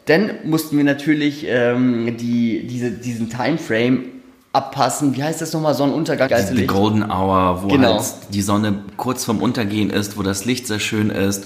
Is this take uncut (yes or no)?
no